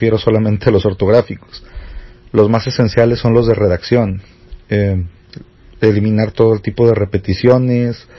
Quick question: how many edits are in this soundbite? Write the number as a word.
zero